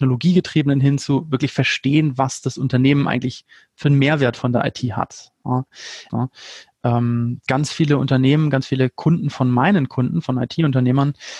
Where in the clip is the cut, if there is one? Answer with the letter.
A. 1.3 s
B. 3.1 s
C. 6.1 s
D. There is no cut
C